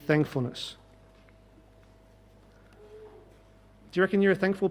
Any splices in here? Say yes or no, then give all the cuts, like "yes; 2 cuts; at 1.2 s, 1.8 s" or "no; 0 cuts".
no; 0 cuts